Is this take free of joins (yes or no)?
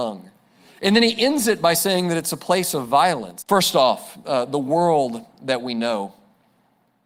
no